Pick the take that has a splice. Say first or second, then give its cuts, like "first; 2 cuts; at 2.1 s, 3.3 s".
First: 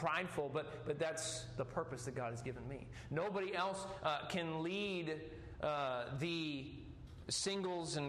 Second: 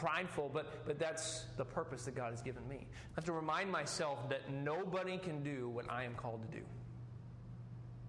second; 1 cut; at 3.1 s